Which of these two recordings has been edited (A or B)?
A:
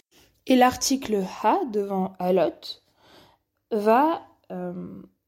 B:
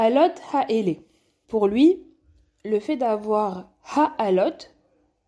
B